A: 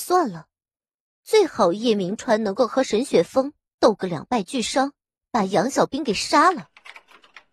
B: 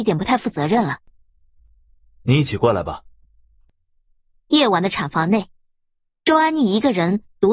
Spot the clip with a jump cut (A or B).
A